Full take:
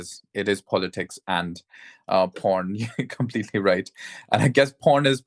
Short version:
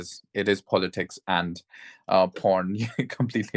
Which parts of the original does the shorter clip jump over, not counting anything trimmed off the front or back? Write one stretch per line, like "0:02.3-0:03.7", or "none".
none